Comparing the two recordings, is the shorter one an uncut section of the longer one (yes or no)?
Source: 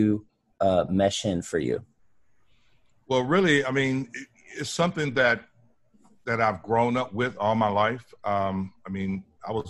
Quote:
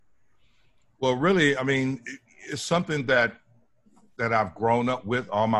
yes